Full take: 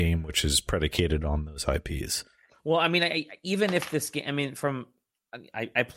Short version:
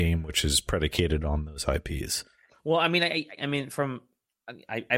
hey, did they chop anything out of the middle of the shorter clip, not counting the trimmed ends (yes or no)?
yes